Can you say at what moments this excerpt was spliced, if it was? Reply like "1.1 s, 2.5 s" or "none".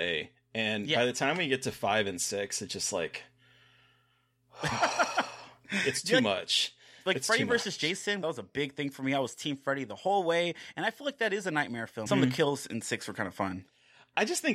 8.2 s, 12.1 s